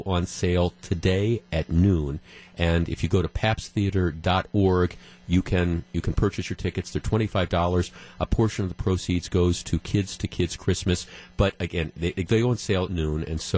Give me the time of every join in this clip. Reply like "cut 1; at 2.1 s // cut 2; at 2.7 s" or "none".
none